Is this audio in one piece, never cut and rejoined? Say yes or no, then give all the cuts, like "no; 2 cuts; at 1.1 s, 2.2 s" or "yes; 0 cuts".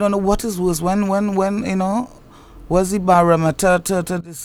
yes; 0 cuts